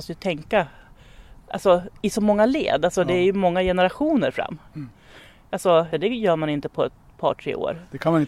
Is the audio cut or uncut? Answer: cut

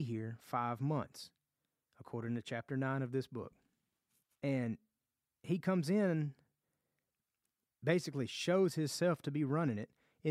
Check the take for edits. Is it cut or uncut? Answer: cut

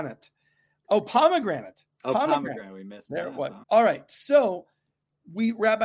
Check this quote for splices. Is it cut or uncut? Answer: cut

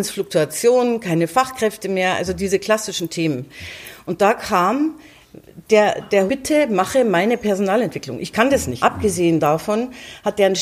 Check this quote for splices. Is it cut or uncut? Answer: cut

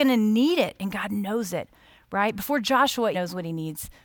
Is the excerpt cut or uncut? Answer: cut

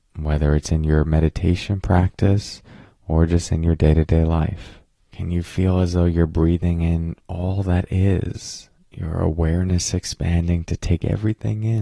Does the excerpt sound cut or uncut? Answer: cut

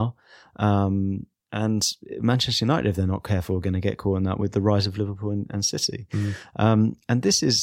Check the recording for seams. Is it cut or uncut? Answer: uncut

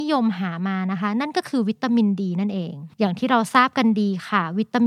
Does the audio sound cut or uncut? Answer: cut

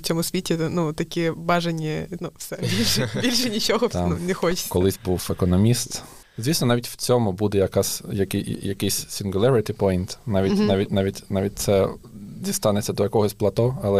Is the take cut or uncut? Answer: cut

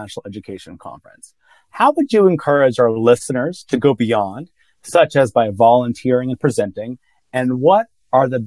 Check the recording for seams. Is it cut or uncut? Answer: uncut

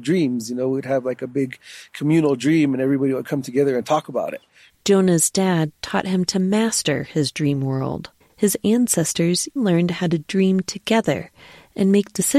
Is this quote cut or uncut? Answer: cut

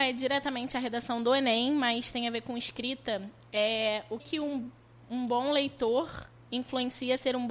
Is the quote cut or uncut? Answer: cut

